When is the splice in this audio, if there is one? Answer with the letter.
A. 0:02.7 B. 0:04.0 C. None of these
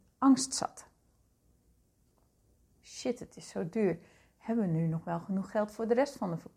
A